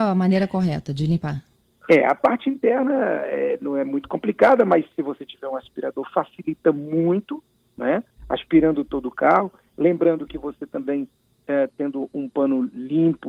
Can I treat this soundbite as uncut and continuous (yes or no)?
yes